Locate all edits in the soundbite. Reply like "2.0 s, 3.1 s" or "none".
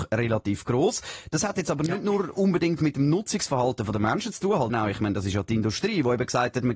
4.7 s